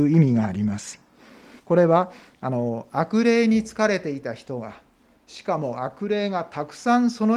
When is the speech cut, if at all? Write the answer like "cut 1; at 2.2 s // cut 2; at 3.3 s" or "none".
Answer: cut 1; at 1.6 s